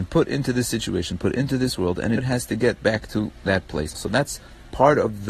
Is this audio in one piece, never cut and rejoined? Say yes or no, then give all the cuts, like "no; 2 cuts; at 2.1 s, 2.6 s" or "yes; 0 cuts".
no; 2 cuts; at 2.2 s, 3.9 s